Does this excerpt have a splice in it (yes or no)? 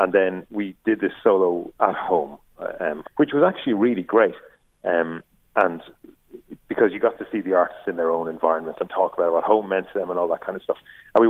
yes